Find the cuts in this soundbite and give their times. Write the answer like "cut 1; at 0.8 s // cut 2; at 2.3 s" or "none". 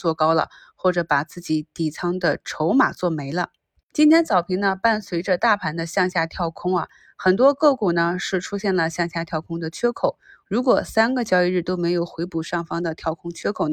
cut 1; at 10.4 s